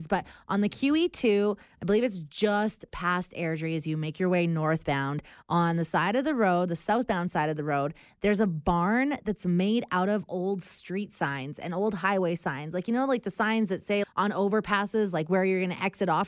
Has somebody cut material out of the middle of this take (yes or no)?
yes